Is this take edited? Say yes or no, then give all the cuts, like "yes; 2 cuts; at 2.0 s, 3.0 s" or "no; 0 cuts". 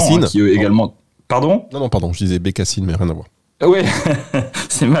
no; 0 cuts